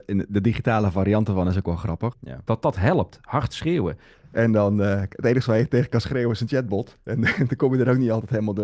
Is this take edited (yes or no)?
yes